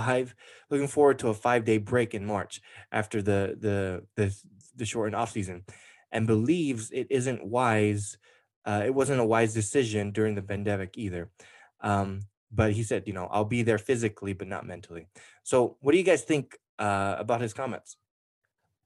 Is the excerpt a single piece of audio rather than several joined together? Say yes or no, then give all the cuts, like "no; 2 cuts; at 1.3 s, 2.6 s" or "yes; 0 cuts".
yes; 0 cuts